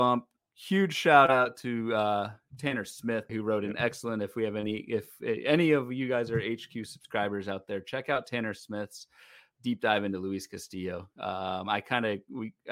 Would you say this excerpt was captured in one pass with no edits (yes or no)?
no